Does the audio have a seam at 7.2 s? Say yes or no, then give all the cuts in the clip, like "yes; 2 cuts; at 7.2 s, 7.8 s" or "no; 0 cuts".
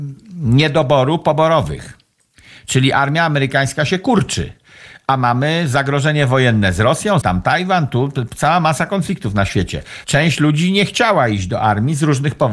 yes; 2 cuts; at 7.2 s, 10.0 s